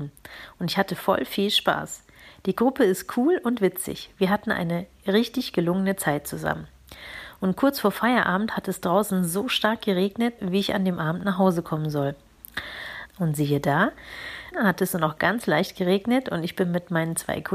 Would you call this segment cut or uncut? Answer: cut